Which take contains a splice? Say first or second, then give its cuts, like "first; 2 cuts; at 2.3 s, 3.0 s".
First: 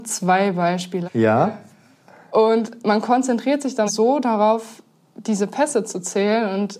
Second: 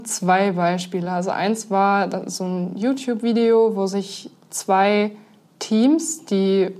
first; 2 cuts; at 1.0 s, 3.9 s